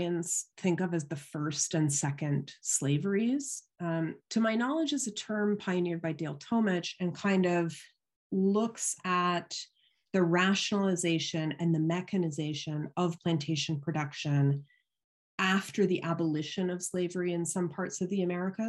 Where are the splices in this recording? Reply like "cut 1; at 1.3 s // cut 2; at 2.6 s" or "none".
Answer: cut 1; at 4.2 s